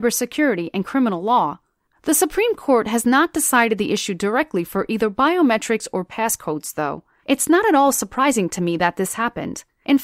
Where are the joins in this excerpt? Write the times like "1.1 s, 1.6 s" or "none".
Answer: 1.9 s, 7.2 s